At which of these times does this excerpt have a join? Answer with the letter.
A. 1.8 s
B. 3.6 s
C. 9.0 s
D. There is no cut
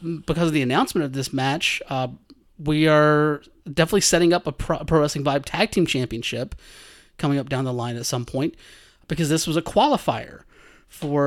D